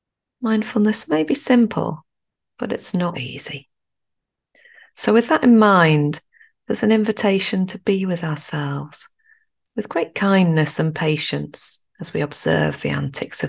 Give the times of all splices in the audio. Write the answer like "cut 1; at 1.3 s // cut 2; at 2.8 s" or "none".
cut 1; at 3.1 s // cut 2; at 11.9 s